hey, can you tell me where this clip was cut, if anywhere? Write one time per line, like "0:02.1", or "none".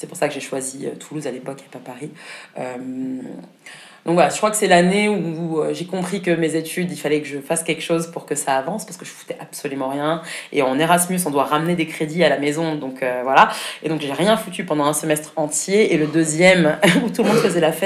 none